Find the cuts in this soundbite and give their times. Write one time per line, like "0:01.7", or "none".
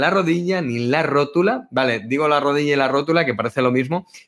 none